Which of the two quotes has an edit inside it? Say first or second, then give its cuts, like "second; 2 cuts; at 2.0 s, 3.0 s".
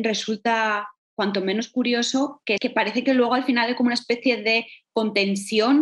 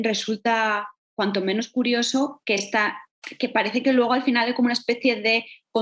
first; 1 cut; at 2.6 s